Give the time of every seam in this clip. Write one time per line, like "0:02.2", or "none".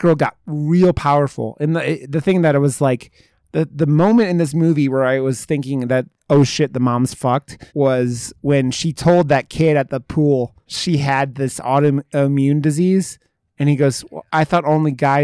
0:07.7
0:10.6